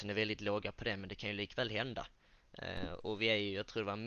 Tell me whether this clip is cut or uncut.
uncut